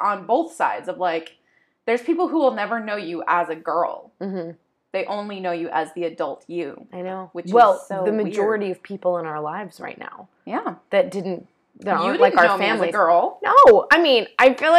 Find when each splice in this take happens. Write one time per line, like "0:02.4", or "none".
none